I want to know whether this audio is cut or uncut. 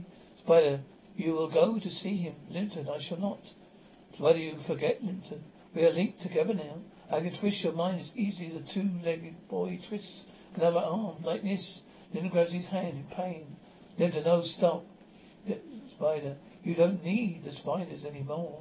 uncut